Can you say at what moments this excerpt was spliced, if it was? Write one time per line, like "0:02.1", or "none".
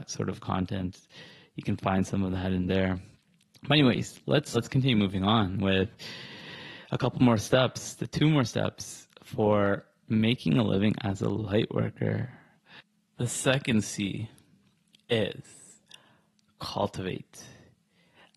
0:04.5